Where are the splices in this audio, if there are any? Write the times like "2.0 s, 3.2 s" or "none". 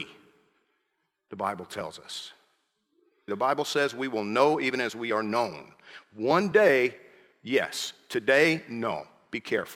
3.3 s